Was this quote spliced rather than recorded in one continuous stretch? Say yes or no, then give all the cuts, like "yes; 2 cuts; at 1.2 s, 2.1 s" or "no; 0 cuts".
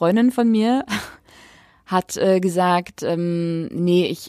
no; 0 cuts